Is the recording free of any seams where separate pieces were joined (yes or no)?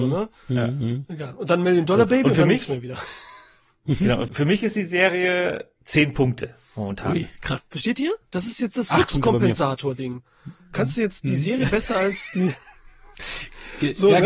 no